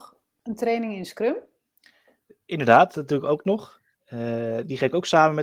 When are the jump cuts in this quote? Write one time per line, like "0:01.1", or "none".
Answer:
none